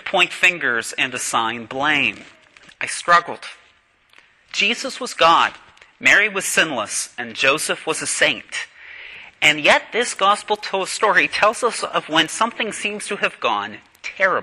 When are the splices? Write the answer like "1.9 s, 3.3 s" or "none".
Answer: 2.7 s